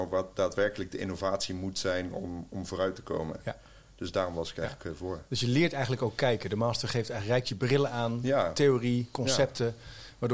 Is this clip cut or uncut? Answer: uncut